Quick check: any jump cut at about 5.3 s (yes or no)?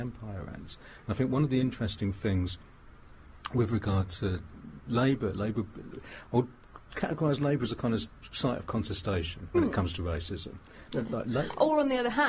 no